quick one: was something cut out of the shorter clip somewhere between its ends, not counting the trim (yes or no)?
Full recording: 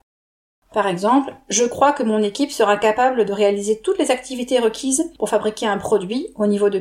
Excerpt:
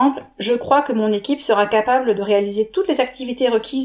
no